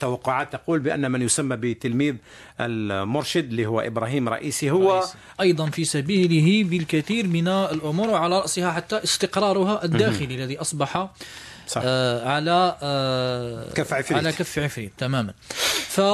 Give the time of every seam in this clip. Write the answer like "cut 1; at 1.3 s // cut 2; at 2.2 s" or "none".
cut 1; at 5.3 s